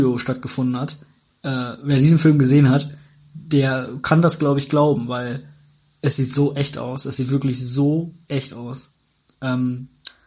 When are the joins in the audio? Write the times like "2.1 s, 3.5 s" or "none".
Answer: none